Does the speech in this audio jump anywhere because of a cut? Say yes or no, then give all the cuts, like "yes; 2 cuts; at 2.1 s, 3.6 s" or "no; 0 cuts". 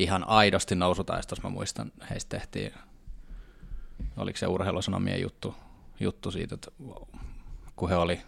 no; 0 cuts